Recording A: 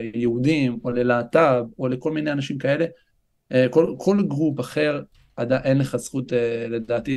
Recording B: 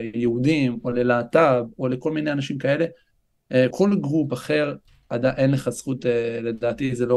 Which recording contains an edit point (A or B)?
B